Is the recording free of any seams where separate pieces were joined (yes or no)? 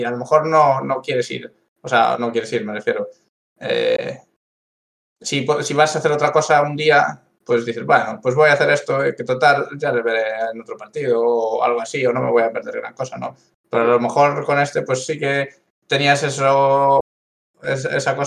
yes